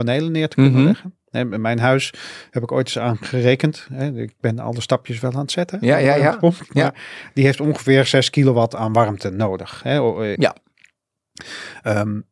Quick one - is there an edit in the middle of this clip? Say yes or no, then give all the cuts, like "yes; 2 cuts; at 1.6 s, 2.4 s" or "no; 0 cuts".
yes; 1 cut; at 10.4 s